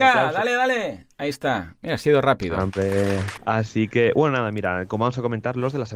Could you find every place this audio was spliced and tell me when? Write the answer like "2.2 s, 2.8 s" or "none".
3.4 s